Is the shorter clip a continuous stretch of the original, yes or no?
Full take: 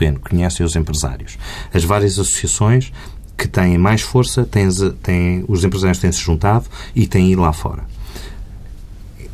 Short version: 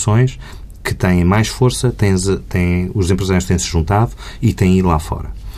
yes